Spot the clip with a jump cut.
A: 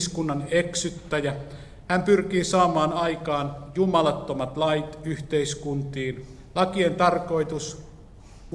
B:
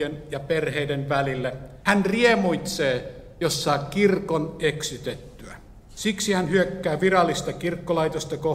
B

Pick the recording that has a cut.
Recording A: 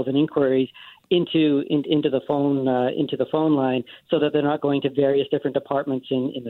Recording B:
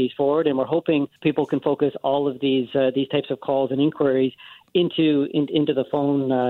B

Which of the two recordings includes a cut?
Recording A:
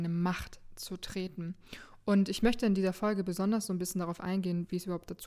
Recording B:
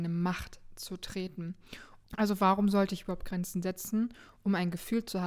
B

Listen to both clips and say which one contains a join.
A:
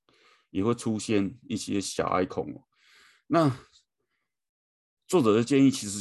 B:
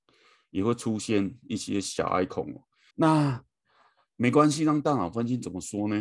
B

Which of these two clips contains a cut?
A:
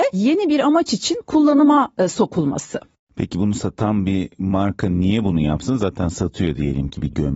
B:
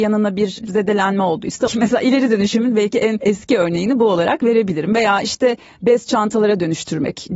B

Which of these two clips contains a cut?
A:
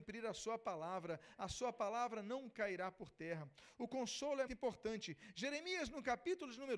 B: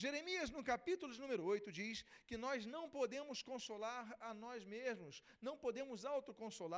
A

